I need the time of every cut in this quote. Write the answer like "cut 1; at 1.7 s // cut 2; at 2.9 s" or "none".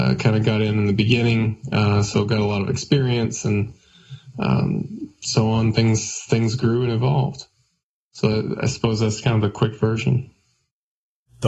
none